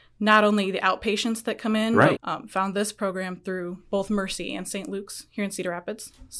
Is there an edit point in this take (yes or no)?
yes